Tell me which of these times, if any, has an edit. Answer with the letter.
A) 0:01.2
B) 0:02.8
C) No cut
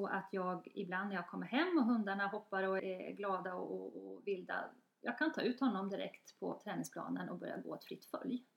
B